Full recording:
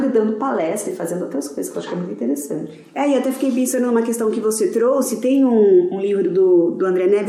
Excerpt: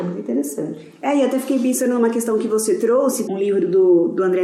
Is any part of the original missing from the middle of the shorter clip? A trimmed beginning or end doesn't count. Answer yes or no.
yes